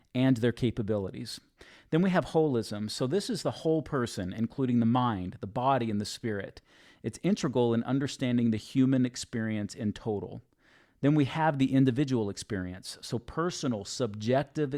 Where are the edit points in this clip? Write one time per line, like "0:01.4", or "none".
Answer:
none